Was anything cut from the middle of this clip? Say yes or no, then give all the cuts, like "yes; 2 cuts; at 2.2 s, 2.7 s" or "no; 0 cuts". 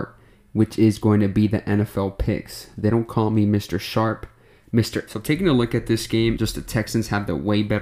yes; 2 cuts; at 5.1 s, 6.4 s